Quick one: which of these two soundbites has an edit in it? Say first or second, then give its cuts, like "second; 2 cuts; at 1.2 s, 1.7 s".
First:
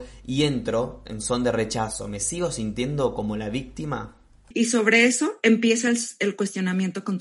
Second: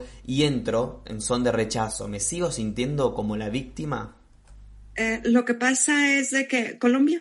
first; 1 cut; at 4.5 s